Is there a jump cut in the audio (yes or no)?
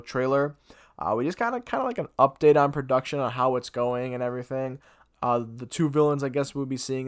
yes